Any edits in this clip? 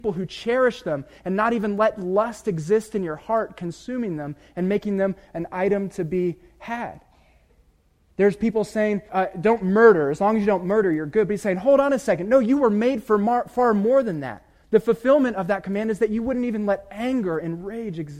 yes; 1 cut; at 9.1 s

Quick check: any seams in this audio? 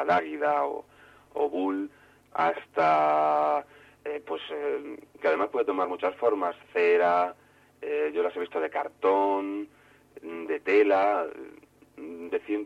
no; 0 cuts

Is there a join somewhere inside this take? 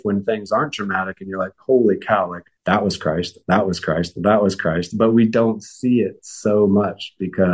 yes; 1 cut; at 2.5 s

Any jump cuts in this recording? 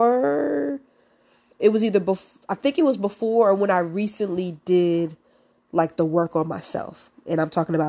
no; 0 cuts

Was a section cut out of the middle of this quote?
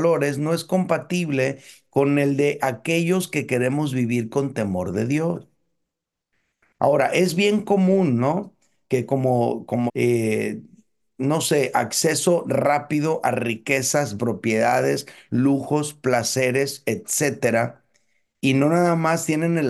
yes; 2 cuts; at 9.9 s, 14.2 s

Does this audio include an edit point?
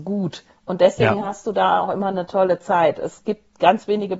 no; 0 cuts

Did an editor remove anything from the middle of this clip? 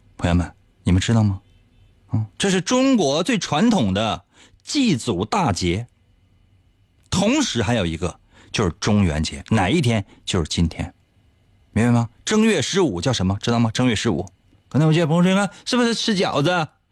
no; 0 cuts

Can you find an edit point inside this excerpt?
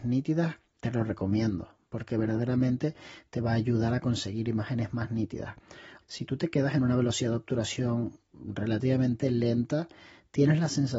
yes; 1 cut; at 6.0 s

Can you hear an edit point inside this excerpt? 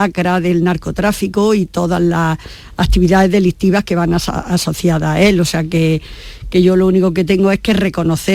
no; 0 cuts

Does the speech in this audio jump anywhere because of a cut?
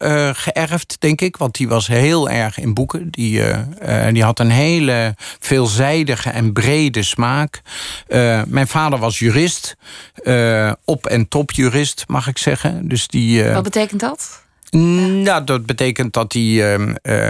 no; 0 cuts

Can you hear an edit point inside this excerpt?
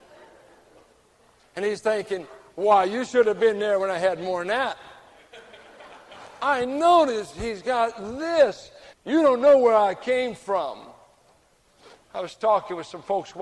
yes; 1 cut; at 8.9 s

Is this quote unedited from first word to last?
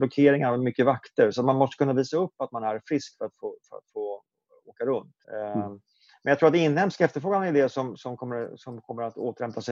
no; 1 cut; at 5.2 s

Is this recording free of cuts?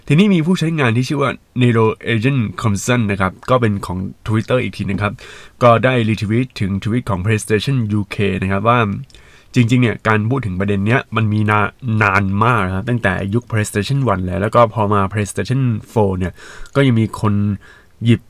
yes; 0 cuts

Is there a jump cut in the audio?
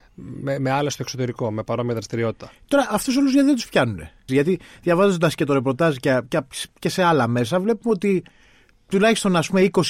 yes; 1 cut; at 4.3 s

